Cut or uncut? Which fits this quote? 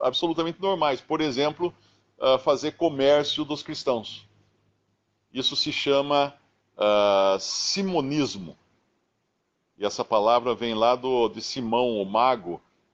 uncut